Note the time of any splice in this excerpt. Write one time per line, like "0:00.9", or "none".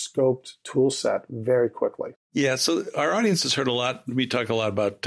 0:02.1